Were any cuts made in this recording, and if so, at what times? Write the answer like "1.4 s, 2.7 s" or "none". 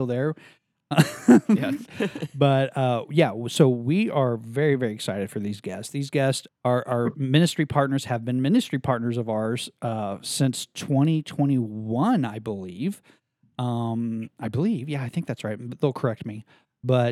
6.5 s

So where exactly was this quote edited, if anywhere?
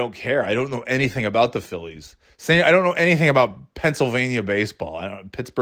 none

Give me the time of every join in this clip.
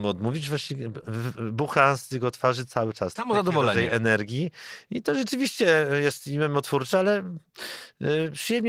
3.2 s

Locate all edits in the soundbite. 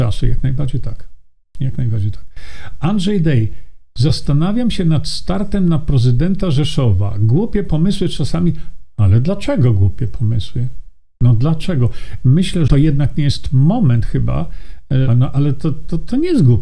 12.7 s, 15.1 s

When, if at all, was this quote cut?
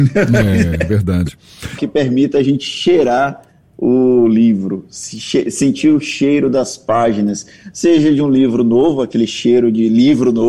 1.8 s

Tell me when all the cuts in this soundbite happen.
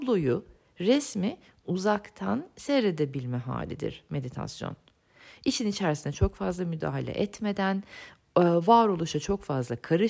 none

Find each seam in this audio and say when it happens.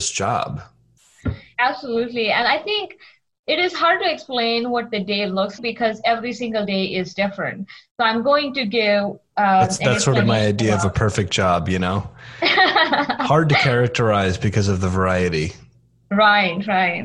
5.6 s

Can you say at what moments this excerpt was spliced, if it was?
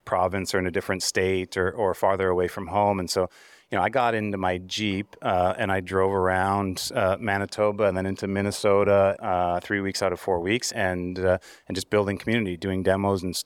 9.2 s, 10.7 s

